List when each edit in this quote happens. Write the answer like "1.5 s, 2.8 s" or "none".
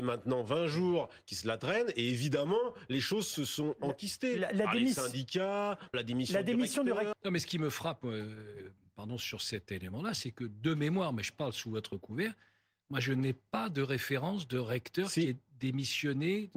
5.9 s, 7.1 s